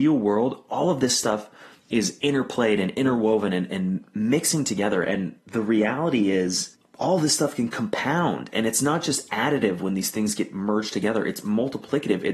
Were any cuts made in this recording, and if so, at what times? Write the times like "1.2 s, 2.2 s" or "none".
5.0 s